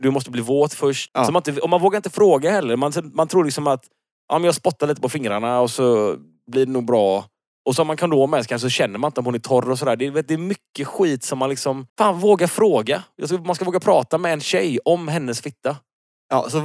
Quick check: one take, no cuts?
no; 2 cuts; at 1.1 s, 11.9 s

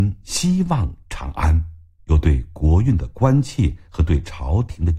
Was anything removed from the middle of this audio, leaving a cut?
yes; 1 cut; at 2.0 s

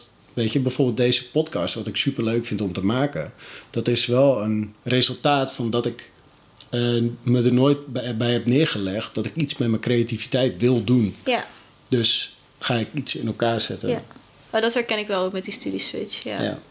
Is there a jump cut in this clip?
no; 0 cuts

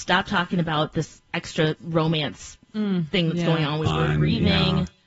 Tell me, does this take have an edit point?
yes; 1 cut; at 3.8 s

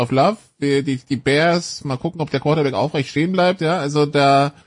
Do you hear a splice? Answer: no; 0 cuts

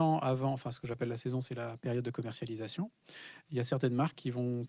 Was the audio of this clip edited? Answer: yes; 1 cut; at 3.5 s

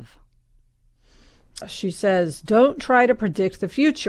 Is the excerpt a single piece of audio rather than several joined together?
no; 1 cut; at 1.6 s

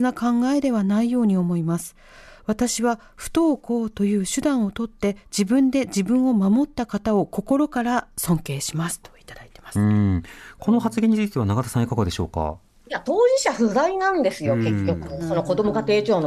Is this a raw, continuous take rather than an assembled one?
yes; 0 cuts

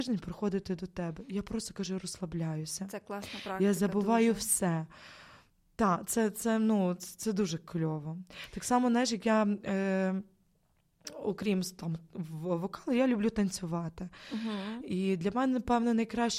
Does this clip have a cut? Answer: no; 0 cuts

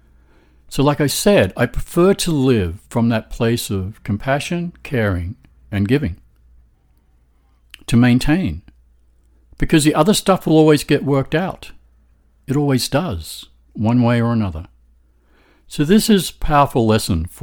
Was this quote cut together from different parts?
no; 0 cuts

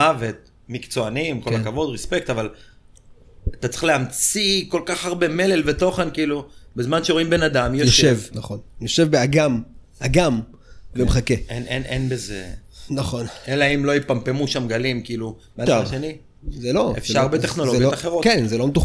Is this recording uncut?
no; 2 cuts; at 8.3 s, 15.7 s

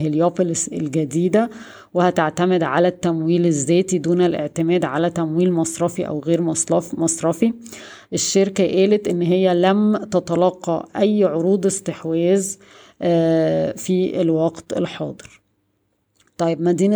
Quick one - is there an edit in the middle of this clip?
no; 0 cuts

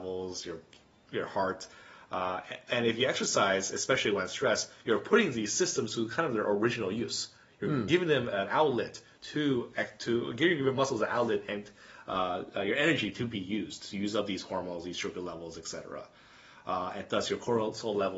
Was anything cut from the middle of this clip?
no; 0 cuts

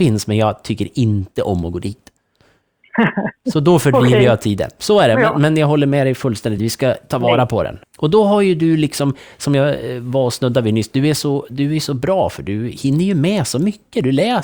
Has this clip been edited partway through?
yes; 2 cuts; at 6.6 s, 7.8 s

